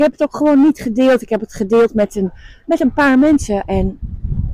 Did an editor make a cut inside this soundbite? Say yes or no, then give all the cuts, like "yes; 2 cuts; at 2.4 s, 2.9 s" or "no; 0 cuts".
no; 0 cuts